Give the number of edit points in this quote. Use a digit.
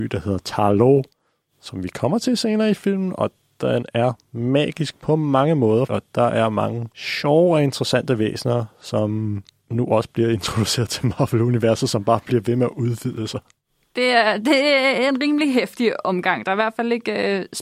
1